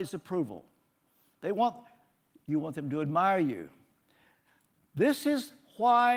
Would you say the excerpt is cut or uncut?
cut